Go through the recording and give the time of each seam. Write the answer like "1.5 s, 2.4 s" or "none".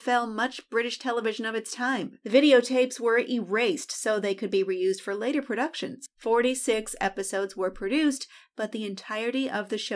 none